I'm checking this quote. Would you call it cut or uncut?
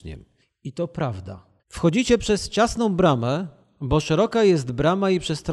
cut